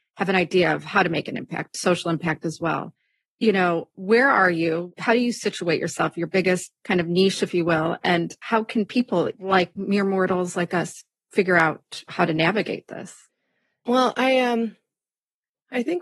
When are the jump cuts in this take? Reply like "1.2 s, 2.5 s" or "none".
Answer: none